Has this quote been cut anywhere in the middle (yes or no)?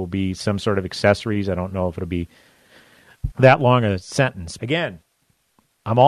yes